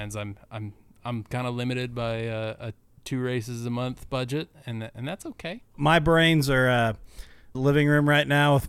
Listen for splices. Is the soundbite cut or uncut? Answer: cut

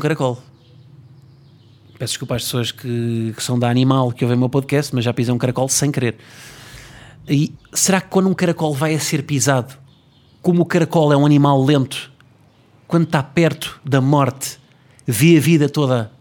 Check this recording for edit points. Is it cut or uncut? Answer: cut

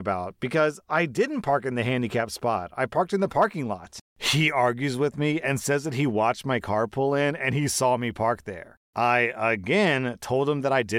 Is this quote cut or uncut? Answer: uncut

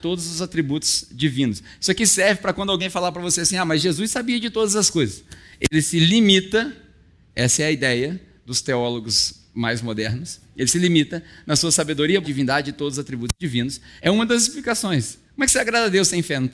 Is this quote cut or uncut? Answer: cut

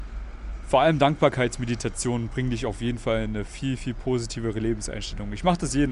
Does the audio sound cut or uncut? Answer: uncut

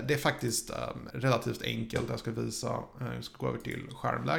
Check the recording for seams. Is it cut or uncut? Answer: cut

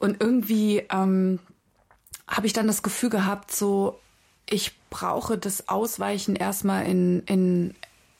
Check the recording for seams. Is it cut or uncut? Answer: uncut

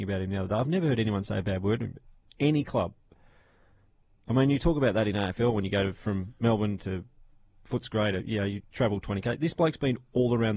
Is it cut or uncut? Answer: uncut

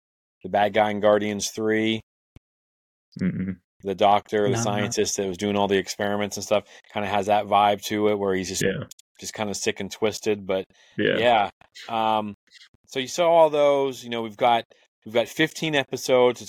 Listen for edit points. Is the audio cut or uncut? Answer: uncut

